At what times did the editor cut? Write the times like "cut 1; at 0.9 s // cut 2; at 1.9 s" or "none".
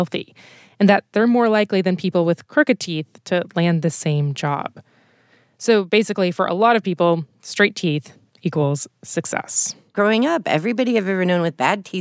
none